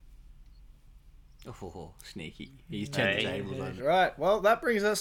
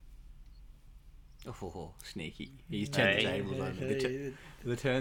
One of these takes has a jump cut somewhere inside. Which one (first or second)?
first